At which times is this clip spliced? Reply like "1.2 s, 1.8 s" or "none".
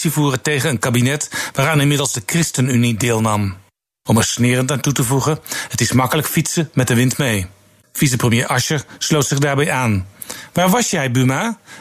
4.1 s, 7.8 s